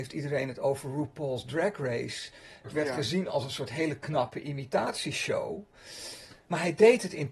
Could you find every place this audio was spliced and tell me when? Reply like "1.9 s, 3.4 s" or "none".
2.6 s